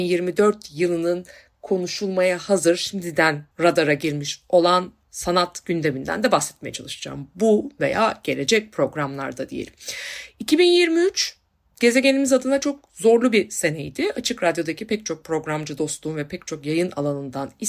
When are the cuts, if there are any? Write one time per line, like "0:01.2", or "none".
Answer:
0:03.5